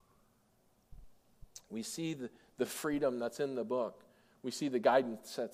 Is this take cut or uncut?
uncut